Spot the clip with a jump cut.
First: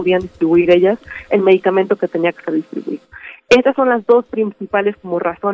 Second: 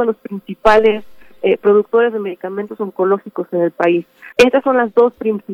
second; 1 cut; at 4.3 s

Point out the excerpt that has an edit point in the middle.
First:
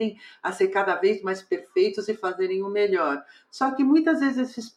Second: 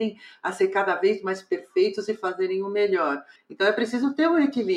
second; 1 cut; at 3.4 s

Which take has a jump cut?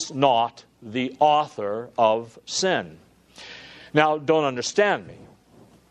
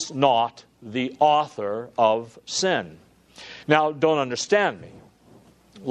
second; 1 cut; at 3.6 s

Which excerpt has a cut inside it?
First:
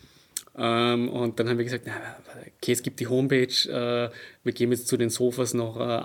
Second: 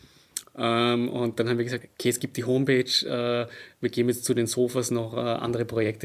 second; 1 cut; at 1.8 s

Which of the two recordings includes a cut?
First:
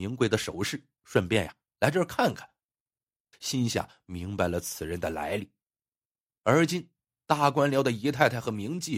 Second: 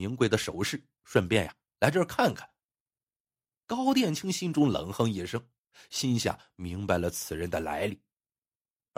first; 1 cut; at 3.3 s

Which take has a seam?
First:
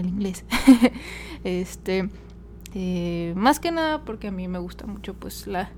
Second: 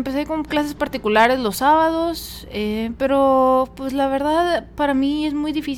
first; 1 cut; at 2.7 s

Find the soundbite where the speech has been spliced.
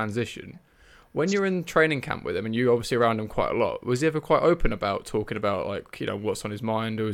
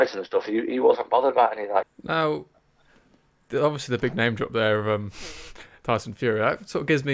second; 1 cut; at 1.8 s

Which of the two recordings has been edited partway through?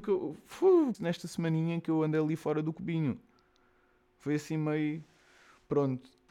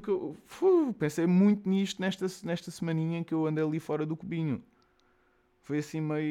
first; 1 cut; at 0.9 s

